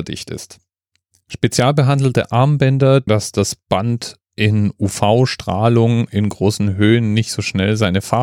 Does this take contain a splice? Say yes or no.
yes